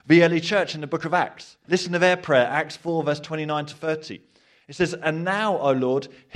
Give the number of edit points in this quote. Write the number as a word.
one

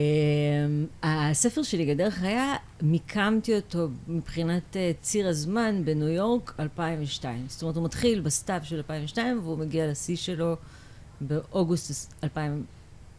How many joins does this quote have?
zero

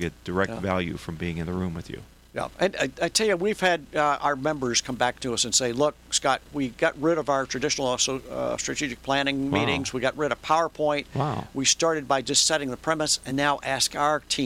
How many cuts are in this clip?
zero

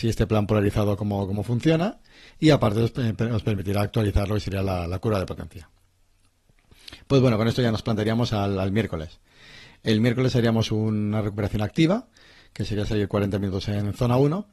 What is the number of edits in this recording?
zero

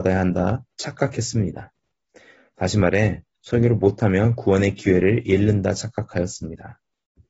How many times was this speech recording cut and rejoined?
one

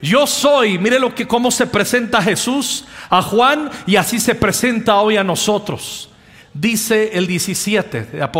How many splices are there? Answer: one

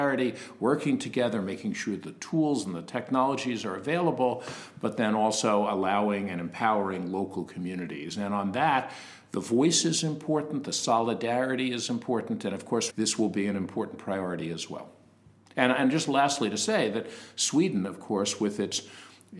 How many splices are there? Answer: one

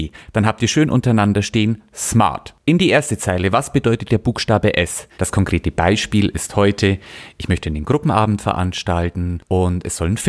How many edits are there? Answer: one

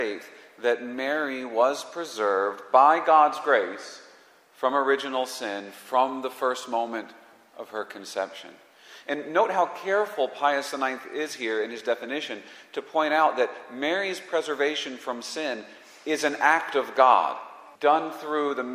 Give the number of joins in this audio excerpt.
one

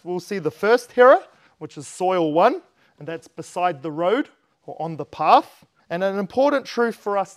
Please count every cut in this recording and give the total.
one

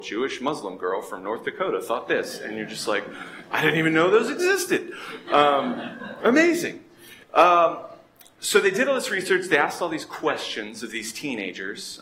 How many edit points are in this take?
one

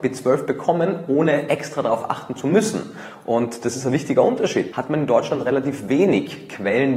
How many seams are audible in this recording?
one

